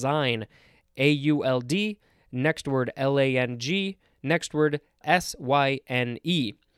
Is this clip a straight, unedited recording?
no; 1 cut; at 5.0 s

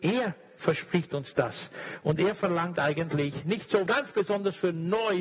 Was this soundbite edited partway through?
yes; 1 cut; at 3.9 s

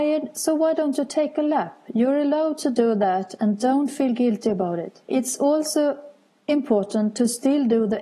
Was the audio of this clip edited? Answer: yes; 1 cut; at 5.0 s

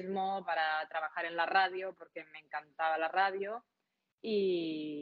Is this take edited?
no; 0 cuts

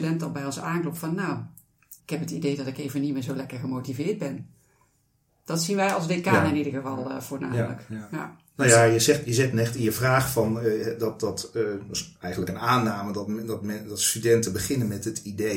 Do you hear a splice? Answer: yes; 1 cut; at 2.0 s

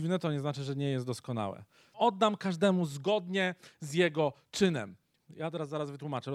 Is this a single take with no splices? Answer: no; 2 cuts; at 1.9 s, 5.2 s

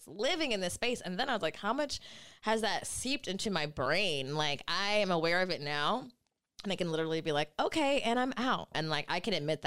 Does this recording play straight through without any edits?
no; 1 cut; at 8.7 s

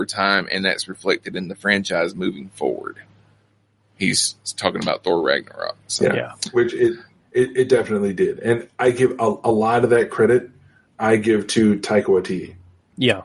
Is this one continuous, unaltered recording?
yes; 0 cuts

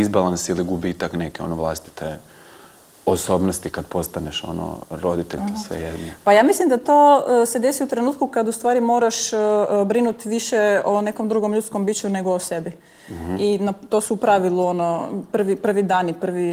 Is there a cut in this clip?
yes; 1 cut; at 5.4 s

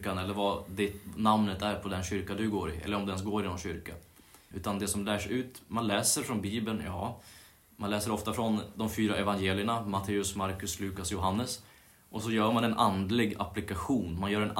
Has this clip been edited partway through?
yes; 1 cut; at 4.5 s

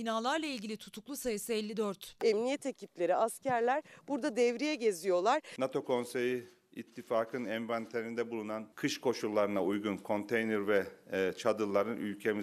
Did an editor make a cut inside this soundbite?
yes; 1 cut; at 2.2 s

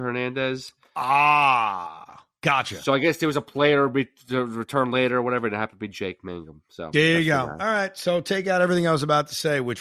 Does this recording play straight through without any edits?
yes; 0 cuts

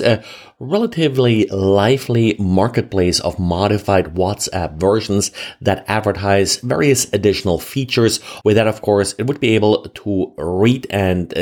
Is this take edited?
yes; 1 cut; at 8.4 s

